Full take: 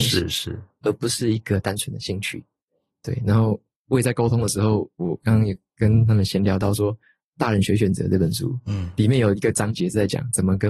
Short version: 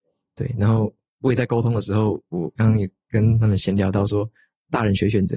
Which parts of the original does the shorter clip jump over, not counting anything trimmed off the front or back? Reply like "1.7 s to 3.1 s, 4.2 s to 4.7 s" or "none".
none